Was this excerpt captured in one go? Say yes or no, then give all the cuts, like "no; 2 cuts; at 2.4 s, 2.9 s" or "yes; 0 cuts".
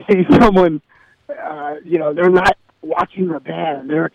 yes; 0 cuts